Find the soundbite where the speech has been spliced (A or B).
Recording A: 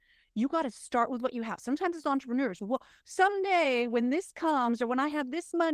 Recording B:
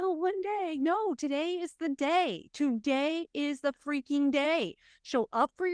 A